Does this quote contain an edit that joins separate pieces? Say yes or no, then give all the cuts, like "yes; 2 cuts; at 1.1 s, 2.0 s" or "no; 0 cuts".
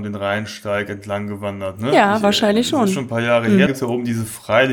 yes; 1 cut; at 3.7 s